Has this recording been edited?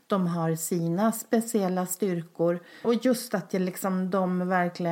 yes; 1 cut; at 2.8 s

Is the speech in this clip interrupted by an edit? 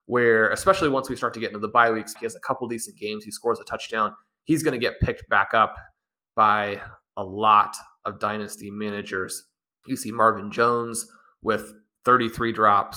yes; 1 cut; at 2.1 s

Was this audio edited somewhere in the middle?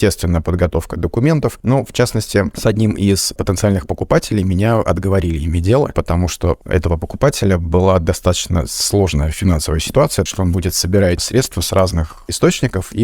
yes; 1 cut; at 10.3 s

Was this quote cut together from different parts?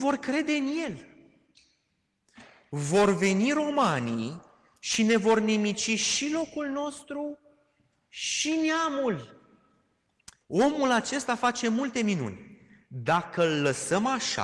yes; 1 cut; at 10.4 s

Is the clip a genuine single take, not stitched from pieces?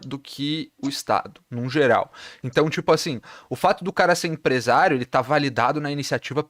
yes; 0 cuts

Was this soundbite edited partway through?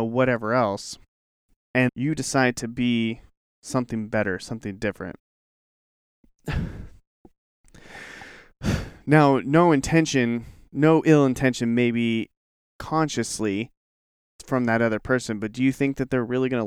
yes; 2 cuts; at 1.9 s, 5.2 s

